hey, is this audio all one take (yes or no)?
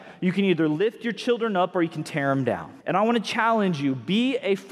no